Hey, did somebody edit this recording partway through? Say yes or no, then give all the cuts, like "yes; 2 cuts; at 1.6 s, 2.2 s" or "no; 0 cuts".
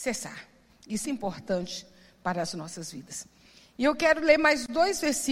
yes; 1 cut; at 1.0 s